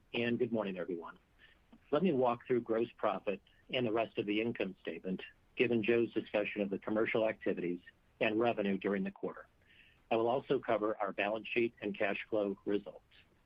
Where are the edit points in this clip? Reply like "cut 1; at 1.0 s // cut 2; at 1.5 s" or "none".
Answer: none